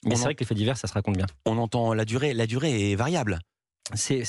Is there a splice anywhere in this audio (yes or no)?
no